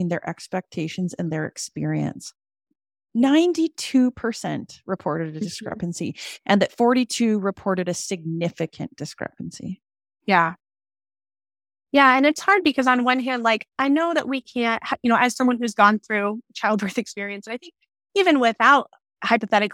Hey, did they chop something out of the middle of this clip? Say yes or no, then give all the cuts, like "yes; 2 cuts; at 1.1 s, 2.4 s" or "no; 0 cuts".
no; 0 cuts